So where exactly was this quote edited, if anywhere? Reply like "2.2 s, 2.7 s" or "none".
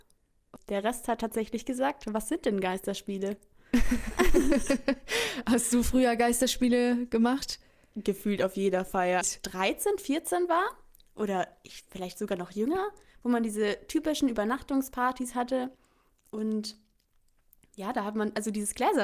9.2 s